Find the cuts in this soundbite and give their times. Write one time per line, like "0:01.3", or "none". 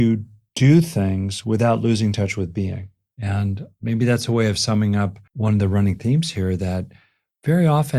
0:03.1
0:05.3